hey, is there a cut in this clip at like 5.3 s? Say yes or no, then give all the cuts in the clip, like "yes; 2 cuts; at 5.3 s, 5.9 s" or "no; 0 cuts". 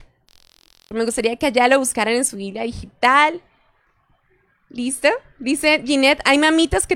no; 1 cut; at 0.9 s